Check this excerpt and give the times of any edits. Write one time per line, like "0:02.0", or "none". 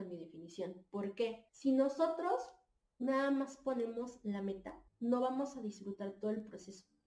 0:01.5
0:04.9

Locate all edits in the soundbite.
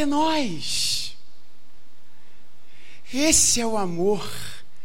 none

